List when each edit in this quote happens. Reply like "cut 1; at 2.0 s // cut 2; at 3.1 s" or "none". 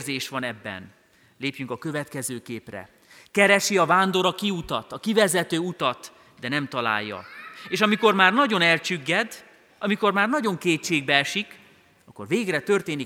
none